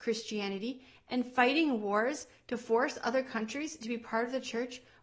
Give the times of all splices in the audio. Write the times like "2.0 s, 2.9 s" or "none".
none